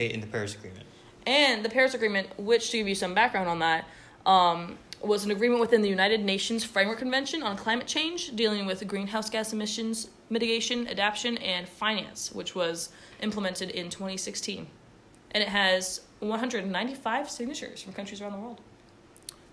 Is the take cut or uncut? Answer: uncut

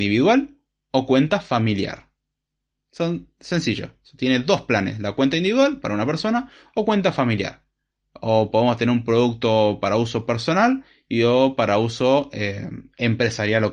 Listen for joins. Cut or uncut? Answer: uncut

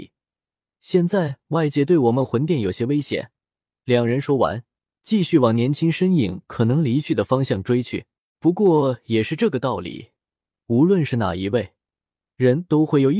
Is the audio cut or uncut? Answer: cut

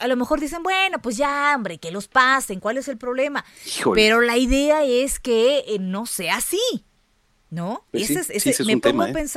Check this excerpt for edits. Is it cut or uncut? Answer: uncut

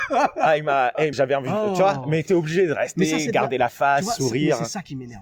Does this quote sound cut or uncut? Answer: cut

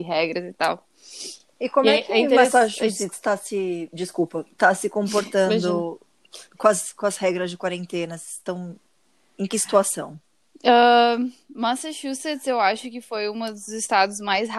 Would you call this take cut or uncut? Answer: uncut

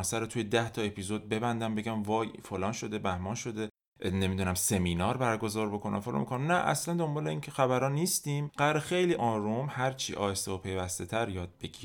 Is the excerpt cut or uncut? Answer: cut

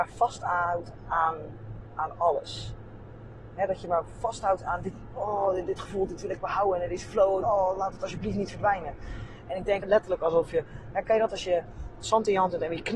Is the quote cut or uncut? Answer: cut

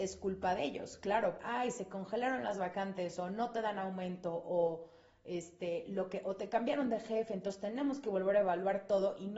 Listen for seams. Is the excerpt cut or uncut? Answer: cut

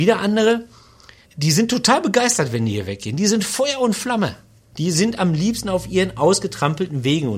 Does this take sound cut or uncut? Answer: cut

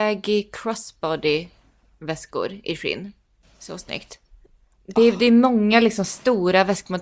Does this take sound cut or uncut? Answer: uncut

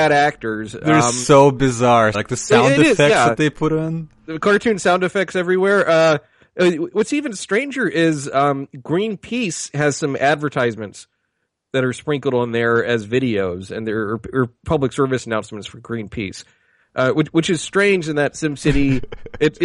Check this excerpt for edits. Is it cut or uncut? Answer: cut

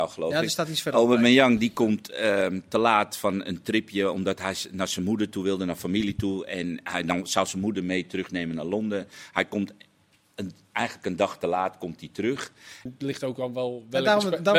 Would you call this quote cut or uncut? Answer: cut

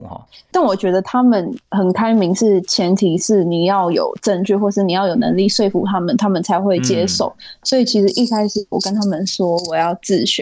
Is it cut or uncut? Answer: uncut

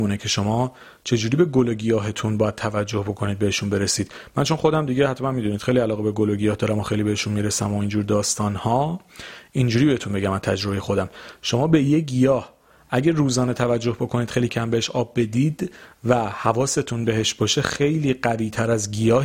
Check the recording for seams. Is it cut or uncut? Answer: cut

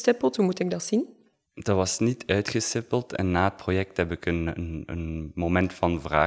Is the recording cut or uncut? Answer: uncut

